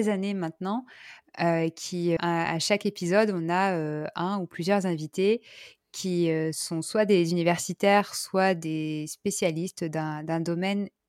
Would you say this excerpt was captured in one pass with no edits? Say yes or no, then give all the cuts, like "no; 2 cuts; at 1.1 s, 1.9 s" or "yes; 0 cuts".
no; 1 cut; at 2.2 s